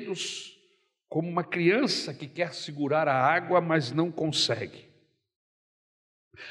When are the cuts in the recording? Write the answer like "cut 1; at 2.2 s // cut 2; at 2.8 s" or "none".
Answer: none